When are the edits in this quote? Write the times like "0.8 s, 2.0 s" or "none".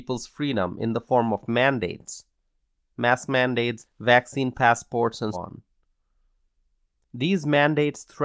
3.8 s, 5.3 s

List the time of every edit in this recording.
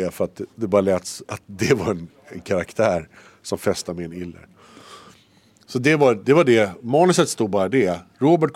none

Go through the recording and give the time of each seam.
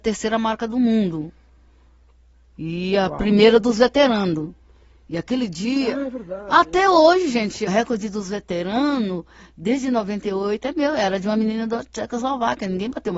7.7 s

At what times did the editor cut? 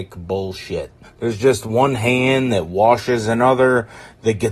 1.0 s

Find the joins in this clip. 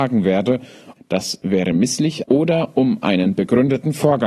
1.0 s, 2.2 s

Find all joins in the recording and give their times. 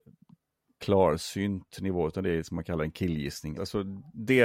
3.6 s

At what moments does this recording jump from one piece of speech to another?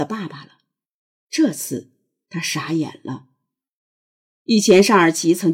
none

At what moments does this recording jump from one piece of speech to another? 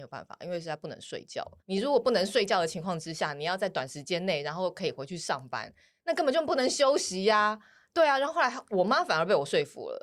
1.6 s

